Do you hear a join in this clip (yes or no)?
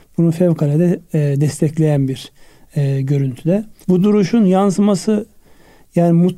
yes